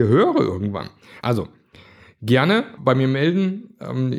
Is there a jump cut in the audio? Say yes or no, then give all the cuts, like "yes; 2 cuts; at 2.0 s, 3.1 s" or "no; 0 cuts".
yes; 2 cuts; at 1.2 s, 2.8 s